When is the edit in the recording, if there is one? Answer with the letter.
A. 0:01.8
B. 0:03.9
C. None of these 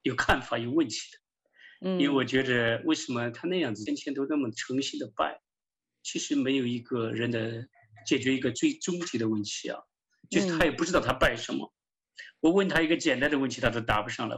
B